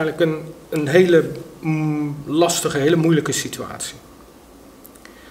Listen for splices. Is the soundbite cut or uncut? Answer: uncut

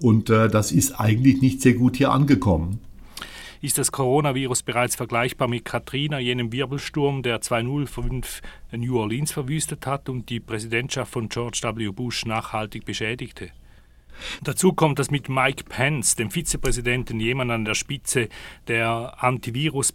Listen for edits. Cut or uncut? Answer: cut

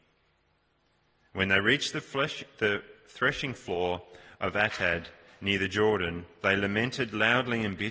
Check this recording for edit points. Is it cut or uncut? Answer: uncut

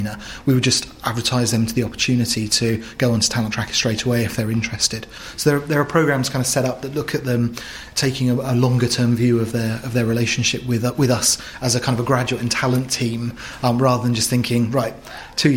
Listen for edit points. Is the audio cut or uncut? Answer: uncut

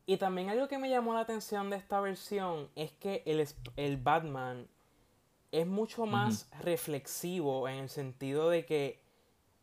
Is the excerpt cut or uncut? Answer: uncut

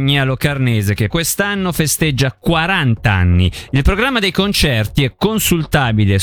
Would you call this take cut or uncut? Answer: cut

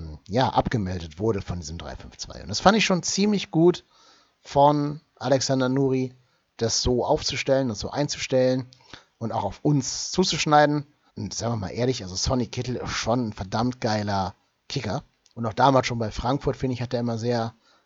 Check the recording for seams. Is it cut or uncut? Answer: cut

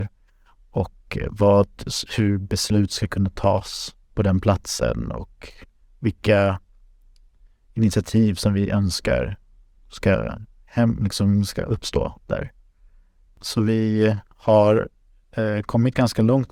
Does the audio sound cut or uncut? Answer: cut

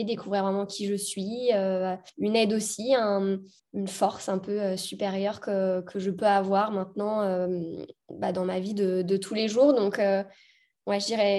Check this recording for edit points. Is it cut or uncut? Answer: uncut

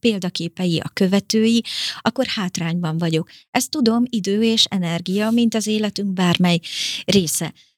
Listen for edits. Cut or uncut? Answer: uncut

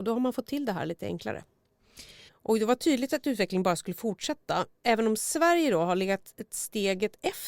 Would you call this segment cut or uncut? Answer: cut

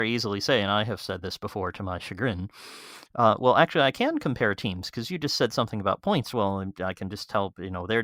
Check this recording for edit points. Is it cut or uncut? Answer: uncut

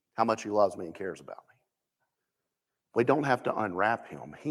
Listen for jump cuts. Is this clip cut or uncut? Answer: cut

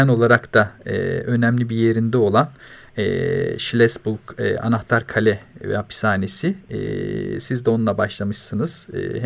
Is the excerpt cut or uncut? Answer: uncut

